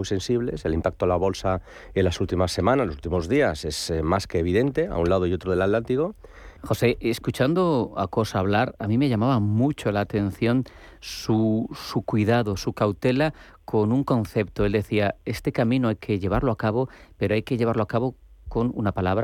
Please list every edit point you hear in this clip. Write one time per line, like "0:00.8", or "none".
0:06.6